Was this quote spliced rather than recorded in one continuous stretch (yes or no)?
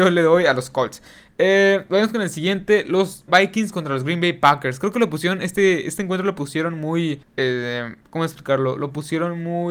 yes